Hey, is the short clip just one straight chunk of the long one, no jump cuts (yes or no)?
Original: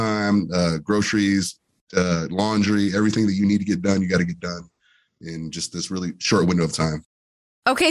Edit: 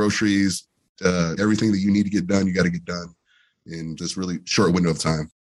no